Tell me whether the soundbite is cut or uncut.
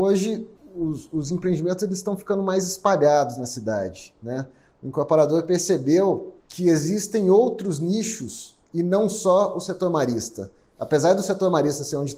cut